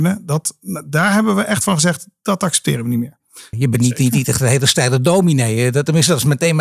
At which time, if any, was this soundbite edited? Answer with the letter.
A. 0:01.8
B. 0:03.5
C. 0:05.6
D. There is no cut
B